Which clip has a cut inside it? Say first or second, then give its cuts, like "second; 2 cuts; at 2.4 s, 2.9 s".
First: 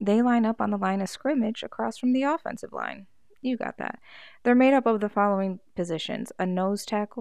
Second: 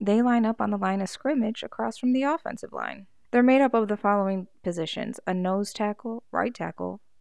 second; 2 cuts; at 3.2 s, 6.2 s